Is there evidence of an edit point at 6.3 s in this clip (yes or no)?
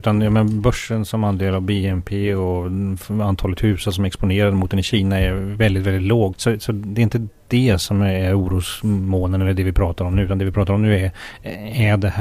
yes